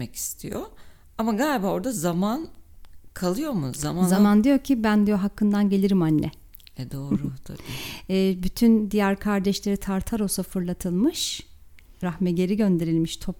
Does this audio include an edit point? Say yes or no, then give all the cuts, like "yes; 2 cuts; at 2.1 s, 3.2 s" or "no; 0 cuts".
no; 0 cuts